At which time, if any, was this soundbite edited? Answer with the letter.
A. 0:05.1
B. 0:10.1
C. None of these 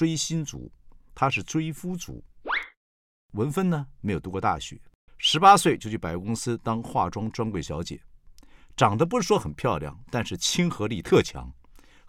A